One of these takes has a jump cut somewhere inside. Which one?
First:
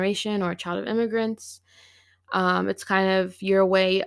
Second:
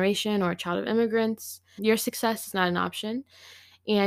second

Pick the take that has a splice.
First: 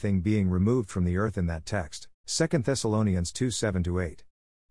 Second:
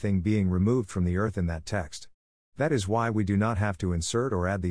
first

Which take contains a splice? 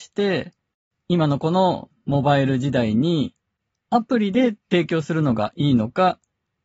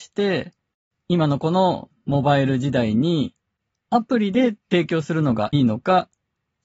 second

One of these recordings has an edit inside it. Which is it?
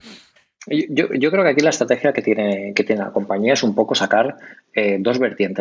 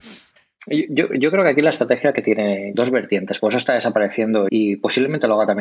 second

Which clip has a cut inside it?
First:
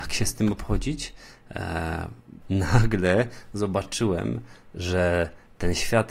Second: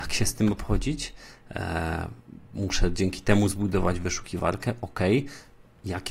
first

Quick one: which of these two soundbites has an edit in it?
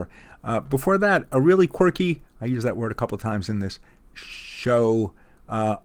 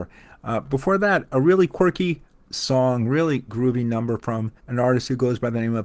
second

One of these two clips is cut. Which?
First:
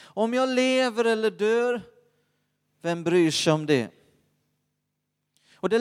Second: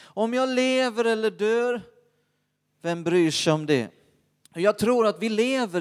second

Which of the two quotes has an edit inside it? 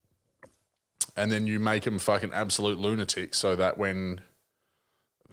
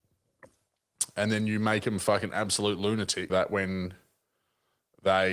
second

